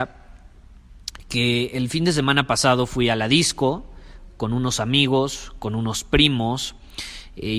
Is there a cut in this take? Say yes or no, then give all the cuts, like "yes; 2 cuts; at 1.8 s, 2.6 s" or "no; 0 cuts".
no; 0 cuts